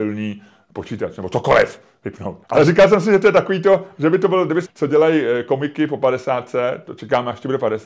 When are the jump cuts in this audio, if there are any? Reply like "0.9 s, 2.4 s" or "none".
2.4 s, 4.7 s